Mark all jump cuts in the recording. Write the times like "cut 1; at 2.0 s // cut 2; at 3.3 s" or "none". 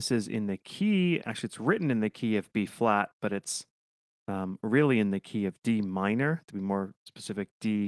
none